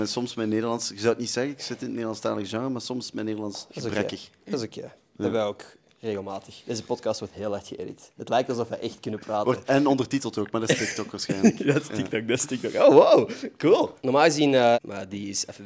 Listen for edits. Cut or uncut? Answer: cut